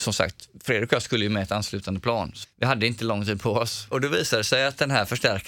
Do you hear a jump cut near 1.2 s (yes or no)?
no